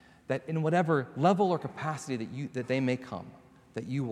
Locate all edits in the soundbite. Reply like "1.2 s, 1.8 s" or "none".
none